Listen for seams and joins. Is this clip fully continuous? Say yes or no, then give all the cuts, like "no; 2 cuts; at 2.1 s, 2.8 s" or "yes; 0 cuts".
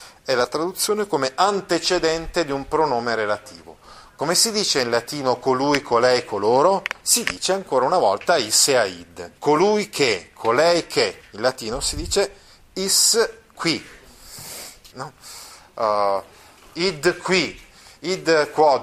no; 3 cuts; at 9.4 s, 11.2 s, 14.9 s